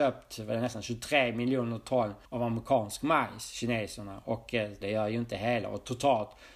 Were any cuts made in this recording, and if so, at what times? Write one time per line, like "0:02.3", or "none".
0:02.2
0:04.8